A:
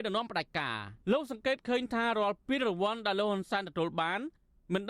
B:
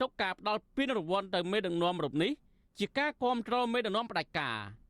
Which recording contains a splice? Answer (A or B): A